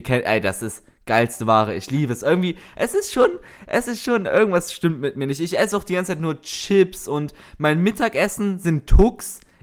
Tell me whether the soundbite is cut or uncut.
uncut